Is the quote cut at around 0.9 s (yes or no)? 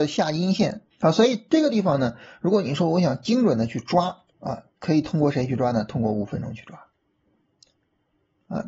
yes